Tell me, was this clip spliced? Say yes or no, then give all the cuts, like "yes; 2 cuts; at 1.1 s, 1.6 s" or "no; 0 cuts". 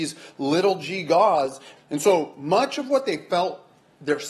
yes; 1 cut; at 1.8 s